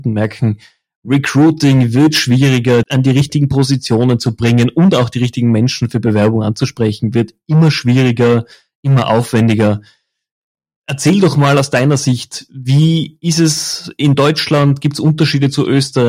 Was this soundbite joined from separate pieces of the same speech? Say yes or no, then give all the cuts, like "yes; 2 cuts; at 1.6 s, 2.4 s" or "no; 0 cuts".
yes; 1 cut; at 2.8 s